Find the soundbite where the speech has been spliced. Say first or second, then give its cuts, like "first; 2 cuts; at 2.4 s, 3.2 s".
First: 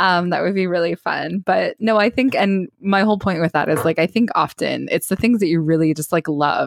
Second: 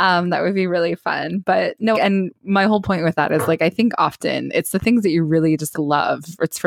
second; 2 cuts; at 1.9 s, 5.7 s